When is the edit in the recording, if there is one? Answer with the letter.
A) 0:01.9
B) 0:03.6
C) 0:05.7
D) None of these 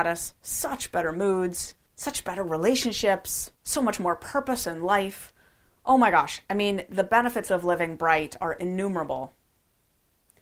A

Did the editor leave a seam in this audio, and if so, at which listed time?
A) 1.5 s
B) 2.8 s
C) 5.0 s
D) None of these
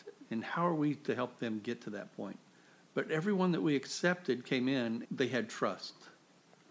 C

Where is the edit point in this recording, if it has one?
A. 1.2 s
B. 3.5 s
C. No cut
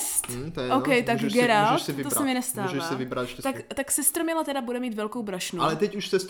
B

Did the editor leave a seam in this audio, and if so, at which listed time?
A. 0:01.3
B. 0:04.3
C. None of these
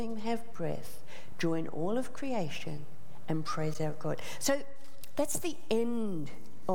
C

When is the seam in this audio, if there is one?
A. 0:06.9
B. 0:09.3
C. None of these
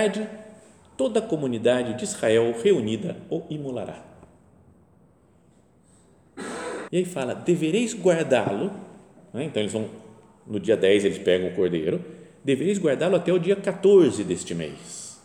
A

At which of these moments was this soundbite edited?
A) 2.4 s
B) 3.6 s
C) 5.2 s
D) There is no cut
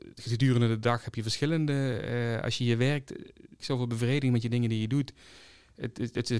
B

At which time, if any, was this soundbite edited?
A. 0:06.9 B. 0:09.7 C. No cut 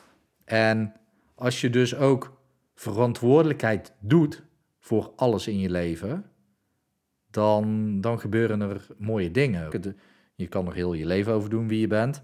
B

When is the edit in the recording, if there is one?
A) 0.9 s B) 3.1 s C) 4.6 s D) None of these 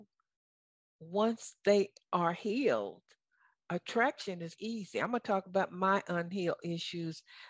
C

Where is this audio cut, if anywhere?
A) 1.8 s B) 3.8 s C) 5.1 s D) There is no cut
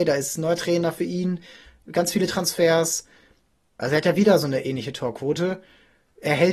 B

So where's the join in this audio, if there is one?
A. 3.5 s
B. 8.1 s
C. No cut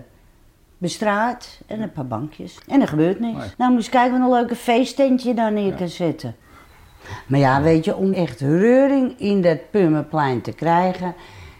B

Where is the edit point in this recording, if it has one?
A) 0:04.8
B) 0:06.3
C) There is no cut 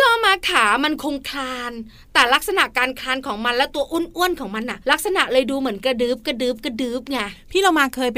A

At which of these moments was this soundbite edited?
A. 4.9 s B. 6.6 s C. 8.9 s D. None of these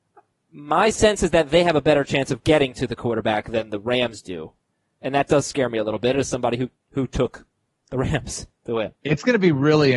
C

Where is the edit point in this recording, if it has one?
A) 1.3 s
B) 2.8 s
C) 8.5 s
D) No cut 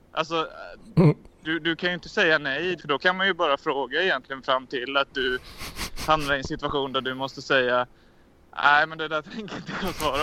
B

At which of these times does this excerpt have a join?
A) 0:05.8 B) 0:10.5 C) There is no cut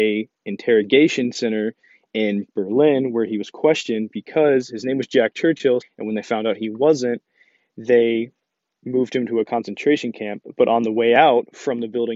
A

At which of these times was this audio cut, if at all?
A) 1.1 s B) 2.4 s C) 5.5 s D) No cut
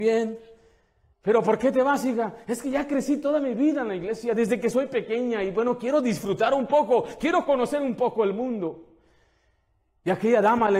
A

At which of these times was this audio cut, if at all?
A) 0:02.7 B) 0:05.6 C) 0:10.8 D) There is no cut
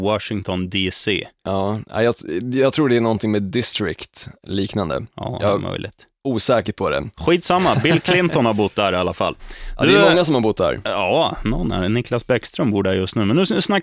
D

